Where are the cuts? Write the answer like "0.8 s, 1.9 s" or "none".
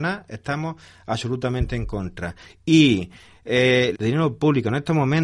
3.9 s